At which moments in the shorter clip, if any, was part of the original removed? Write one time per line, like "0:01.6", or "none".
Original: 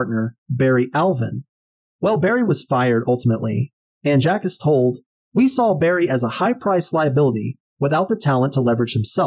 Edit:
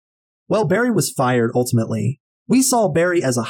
0:02.4